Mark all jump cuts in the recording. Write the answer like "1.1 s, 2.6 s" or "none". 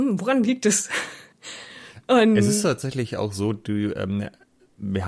1.3 s